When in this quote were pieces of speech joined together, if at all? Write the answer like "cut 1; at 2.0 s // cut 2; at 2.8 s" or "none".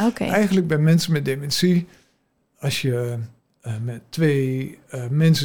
none

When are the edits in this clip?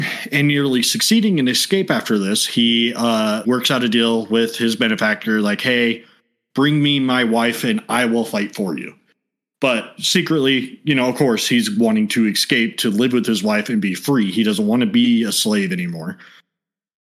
cut 1; at 3.4 s

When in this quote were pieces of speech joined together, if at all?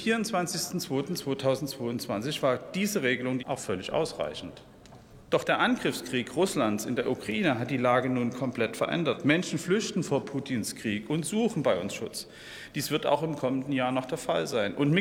cut 1; at 3.4 s

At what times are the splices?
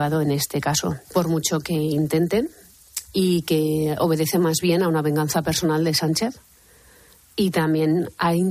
cut 1; at 1.1 s

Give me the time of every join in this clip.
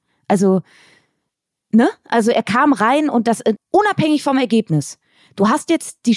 cut 1; at 3.6 s

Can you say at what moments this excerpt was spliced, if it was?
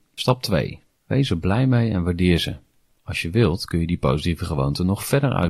cut 1; at 1.0 s

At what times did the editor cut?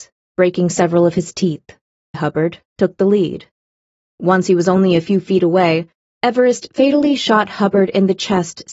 cut 1; at 2.1 s

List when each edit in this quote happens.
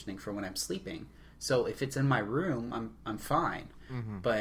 none

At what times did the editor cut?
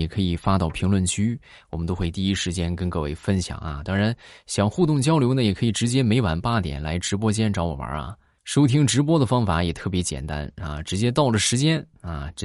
none

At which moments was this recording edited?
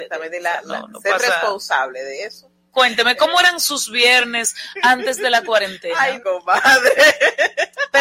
cut 1; at 2.7 s // cut 2; at 6.2 s

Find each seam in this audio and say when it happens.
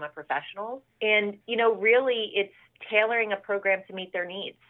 cut 1; at 0.9 s

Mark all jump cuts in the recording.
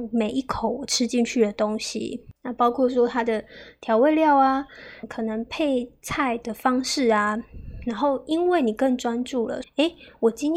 cut 1; at 2.4 s // cut 2; at 5.0 s // cut 3; at 9.6 s

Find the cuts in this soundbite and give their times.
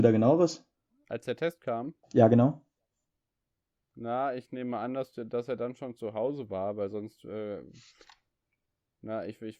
cut 1; at 2.0 s

